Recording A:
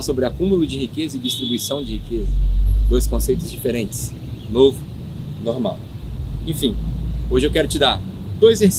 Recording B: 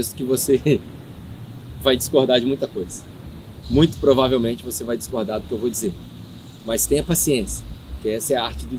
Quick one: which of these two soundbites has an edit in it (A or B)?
B